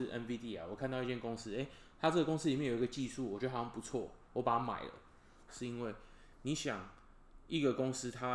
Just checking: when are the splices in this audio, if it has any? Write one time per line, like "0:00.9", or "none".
0:05.5